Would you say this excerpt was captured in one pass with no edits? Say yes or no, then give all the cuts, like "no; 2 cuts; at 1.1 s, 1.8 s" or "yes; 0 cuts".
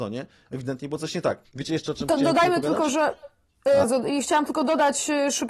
no; 2 cuts; at 1.5 s, 3.8 s